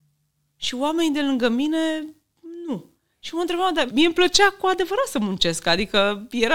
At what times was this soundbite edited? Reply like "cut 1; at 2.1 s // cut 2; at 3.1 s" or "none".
cut 1; at 3.9 s